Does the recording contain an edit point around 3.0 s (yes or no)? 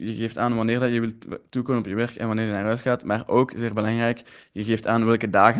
no